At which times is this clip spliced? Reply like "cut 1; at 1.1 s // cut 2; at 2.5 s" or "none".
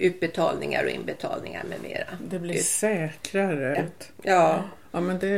cut 1; at 3.7 s